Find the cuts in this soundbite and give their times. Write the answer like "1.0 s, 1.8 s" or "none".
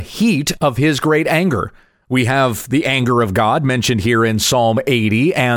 none

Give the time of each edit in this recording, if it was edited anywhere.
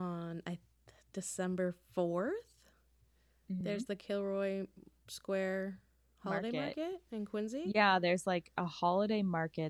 none

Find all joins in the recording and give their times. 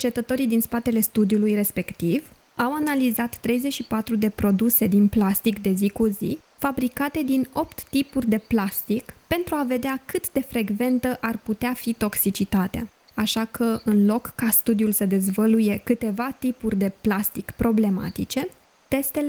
13.1 s

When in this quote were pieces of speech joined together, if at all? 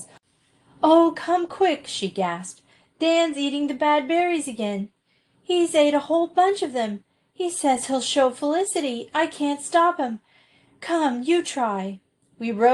1.1 s

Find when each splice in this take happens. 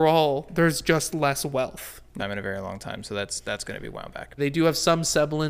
2.2 s, 4.4 s

